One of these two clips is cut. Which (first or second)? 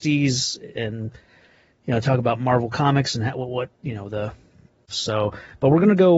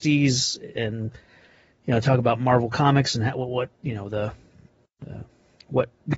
first